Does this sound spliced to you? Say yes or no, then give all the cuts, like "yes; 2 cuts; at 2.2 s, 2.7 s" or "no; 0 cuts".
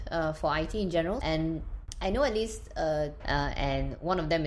yes; 2 cuts; at 1.2 s, 3.2 s